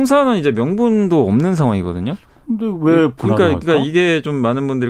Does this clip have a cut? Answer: no; 0 cuts

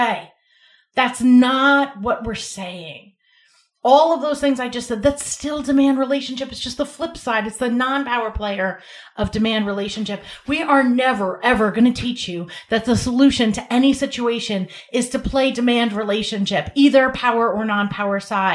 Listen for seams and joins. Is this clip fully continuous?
yes; 0 cuts

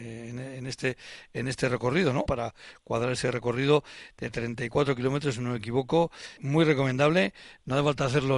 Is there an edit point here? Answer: yes; 2 cuts; at 2.3 s, 6.4 s

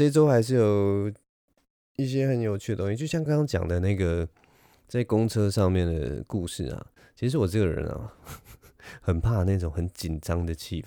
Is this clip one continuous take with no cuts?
no; 1 cut; at 3.3 s

